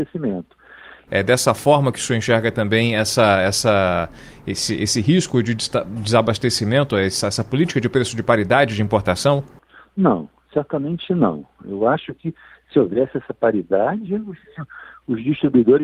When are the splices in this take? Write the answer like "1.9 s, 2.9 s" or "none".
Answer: 1.1 s